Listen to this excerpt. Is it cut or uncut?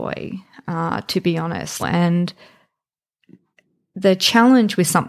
cut